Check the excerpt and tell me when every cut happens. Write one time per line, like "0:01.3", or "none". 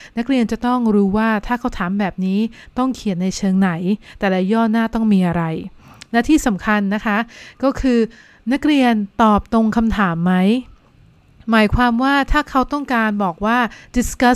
none

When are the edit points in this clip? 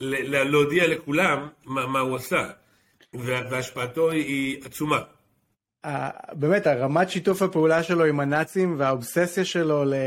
0:05.6

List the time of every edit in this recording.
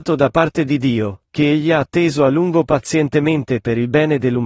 none

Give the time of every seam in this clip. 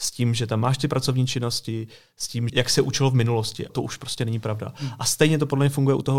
0:02.5
0:03.7

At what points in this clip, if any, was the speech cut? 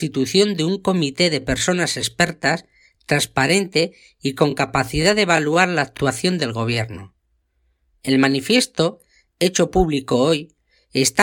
0:07.9

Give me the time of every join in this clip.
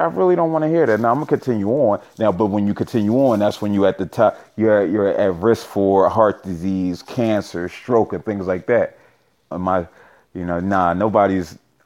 0:09.5

